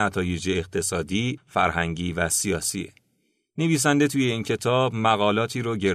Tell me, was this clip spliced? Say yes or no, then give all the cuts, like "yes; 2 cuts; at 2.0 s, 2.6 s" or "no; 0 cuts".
yes; 1 cut; at 1.4 s